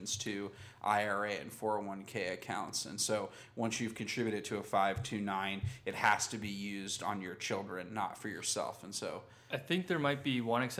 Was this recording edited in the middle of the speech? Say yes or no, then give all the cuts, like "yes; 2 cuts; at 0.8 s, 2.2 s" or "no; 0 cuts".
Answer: no; 0 cuts